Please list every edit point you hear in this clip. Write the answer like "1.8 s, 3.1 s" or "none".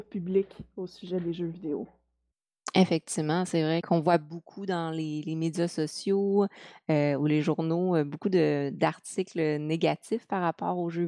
none